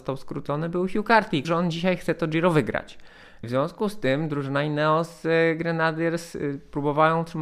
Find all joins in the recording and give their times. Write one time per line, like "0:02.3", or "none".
0:01.4
0:03.4